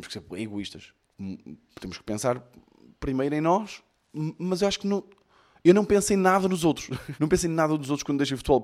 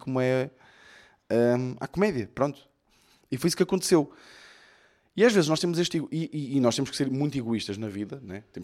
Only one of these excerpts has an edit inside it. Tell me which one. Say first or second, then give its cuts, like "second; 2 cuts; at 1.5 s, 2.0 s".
first; 1 cut; at 7.2 s